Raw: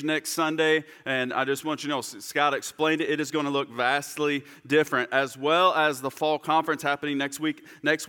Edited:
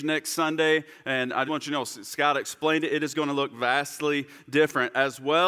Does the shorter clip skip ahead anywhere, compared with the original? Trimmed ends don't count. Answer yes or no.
yes